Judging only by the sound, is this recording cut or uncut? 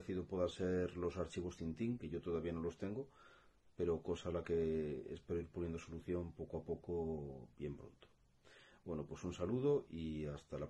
uncut